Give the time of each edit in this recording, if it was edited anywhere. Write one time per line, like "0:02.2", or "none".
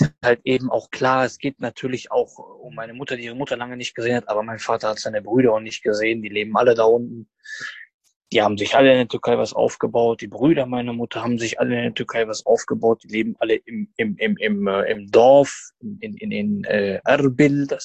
none